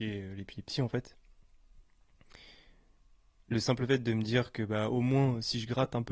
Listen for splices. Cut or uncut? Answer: uncut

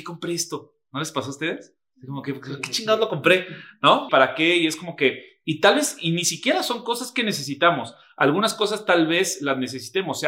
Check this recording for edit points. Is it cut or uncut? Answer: cut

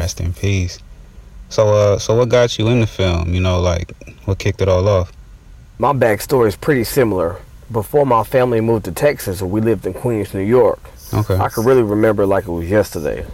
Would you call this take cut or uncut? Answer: uncut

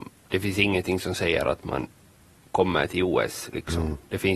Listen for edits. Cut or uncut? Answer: uncut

